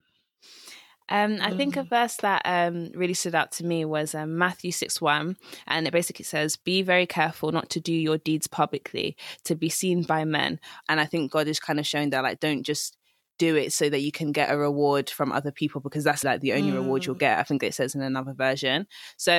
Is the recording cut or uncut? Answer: cut